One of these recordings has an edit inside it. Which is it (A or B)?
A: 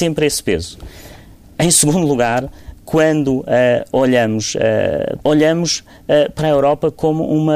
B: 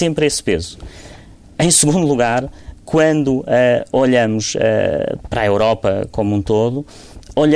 A